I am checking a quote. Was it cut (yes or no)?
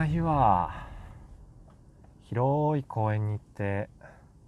no